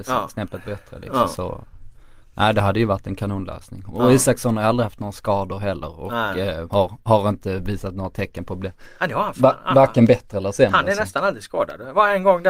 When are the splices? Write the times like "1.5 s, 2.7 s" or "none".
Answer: none